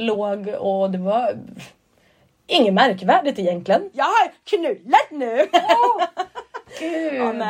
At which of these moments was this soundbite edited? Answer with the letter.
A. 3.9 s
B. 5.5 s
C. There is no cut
A